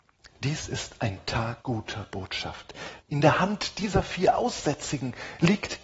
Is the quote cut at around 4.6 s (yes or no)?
no